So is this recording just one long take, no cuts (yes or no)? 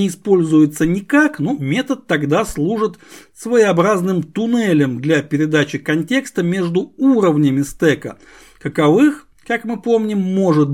yes